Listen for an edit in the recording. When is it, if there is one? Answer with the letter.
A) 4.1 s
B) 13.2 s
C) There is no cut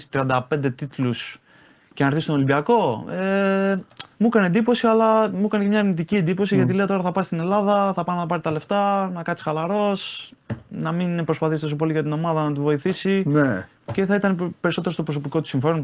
A